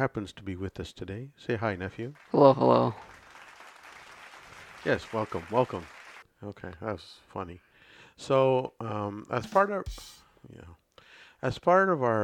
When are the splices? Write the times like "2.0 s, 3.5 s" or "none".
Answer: 6.2 s